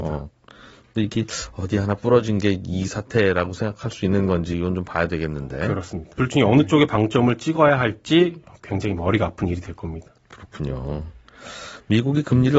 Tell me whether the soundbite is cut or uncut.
cut